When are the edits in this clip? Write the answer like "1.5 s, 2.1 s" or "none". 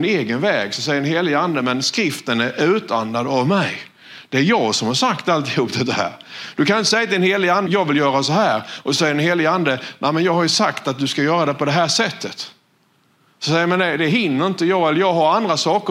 7.7 s